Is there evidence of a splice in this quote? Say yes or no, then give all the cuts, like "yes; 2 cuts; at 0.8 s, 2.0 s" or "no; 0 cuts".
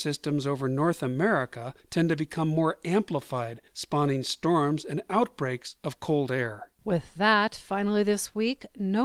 no; 0 cuts